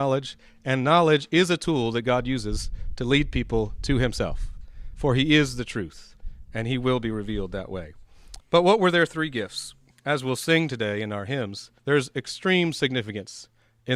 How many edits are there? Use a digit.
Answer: 3